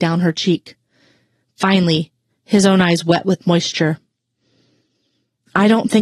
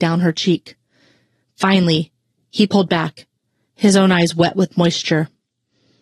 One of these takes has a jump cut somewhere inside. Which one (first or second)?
first